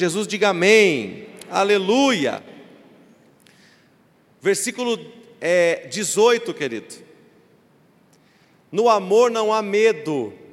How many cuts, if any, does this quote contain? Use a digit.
0